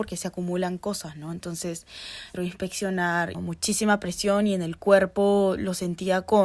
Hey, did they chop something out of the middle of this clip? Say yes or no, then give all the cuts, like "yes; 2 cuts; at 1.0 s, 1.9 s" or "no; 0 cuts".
yes; 2 cuts; at 2.3 s, 3.3 s